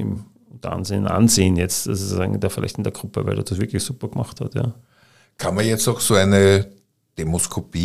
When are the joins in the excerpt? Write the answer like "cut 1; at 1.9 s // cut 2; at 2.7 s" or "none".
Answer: none